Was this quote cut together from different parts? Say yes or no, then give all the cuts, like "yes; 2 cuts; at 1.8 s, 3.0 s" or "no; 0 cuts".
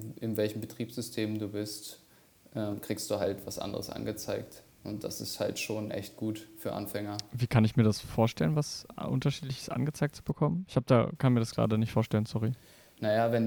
no; 0 cuts